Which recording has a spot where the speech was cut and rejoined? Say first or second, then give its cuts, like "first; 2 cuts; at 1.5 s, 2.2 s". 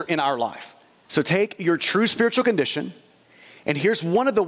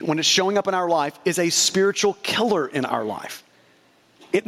first; 1 cut; at 1.1 s